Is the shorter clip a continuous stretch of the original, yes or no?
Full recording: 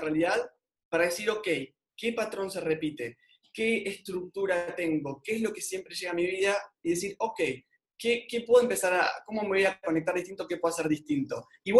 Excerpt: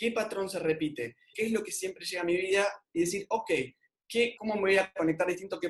no